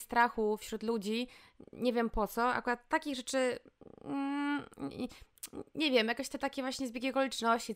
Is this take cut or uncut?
uncut